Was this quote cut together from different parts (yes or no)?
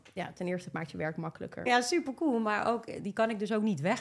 yes